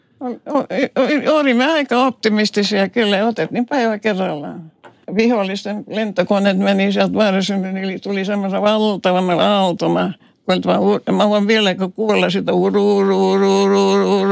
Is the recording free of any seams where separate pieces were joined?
yes; 0 cuts

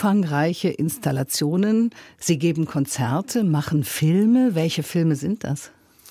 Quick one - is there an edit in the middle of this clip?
no; 0 cuts

